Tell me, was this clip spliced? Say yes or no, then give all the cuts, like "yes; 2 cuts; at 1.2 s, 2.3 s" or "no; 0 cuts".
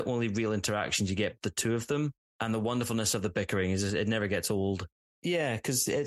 yes; 2 cuts; at 1.4 s, 5.0 s